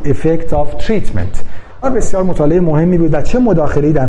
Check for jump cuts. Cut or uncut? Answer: cut